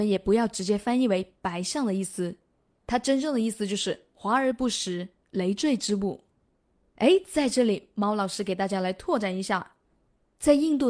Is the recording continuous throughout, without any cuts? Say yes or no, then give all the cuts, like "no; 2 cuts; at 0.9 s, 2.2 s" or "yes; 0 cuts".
yes; 0 cuts